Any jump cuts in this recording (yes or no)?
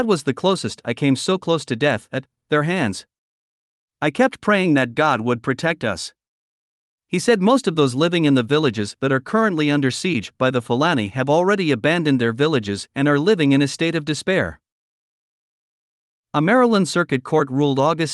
no